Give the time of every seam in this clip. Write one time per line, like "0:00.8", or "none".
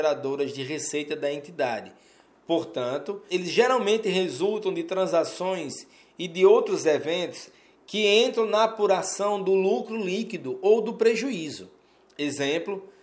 0:03.3